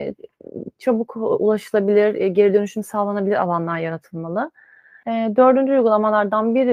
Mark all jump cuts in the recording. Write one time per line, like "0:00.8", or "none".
0:05.0